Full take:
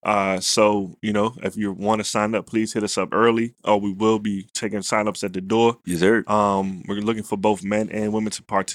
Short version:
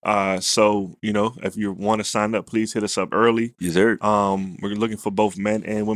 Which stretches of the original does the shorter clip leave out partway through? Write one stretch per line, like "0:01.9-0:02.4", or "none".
0:03.6-0:05.8